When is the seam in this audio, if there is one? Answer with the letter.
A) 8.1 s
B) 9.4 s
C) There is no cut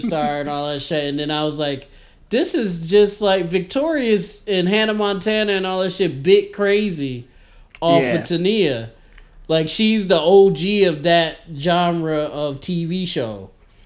C